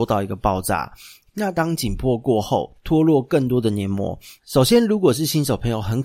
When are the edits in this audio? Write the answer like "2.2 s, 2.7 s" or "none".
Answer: 1.3 s, 2.7 s, 4.4 s